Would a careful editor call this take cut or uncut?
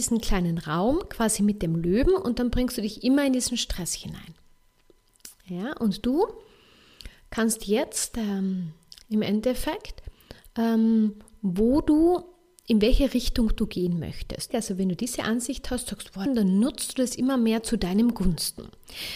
cut